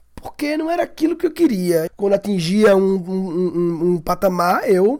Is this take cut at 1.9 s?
yes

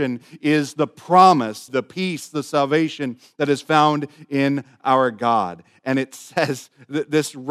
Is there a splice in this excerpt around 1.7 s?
yes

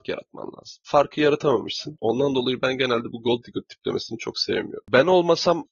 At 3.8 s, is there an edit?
no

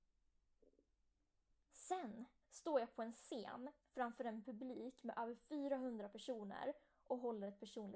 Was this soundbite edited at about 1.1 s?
no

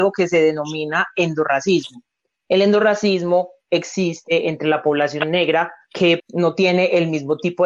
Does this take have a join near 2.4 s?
no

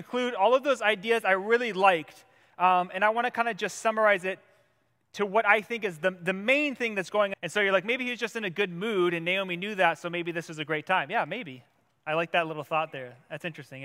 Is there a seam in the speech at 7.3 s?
yes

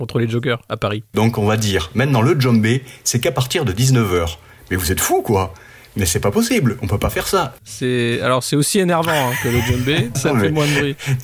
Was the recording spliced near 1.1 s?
yes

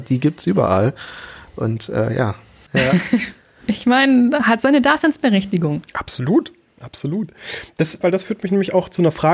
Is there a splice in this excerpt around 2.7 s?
yes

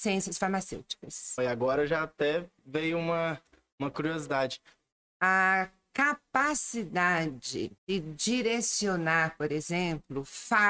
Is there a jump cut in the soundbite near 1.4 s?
yes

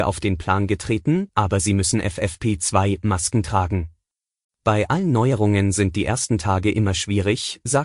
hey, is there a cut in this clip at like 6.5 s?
no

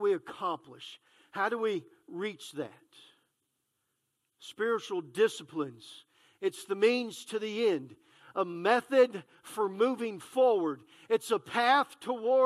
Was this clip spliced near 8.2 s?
no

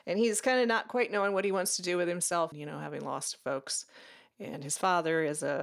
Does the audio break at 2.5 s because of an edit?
yes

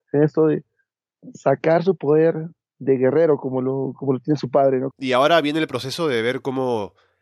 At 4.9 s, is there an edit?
yes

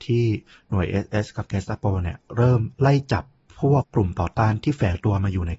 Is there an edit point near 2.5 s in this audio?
no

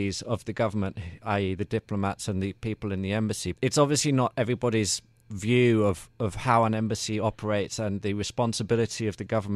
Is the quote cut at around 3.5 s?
yes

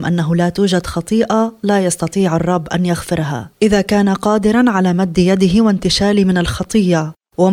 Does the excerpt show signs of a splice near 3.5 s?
yes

